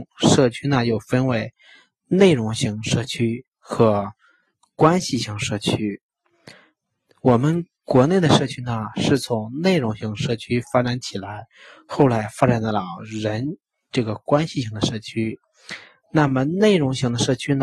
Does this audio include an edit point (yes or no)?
no